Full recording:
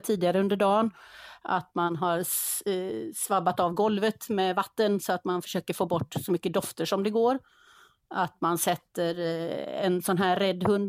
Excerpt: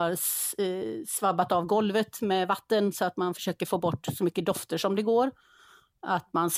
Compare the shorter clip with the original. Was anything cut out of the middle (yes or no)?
no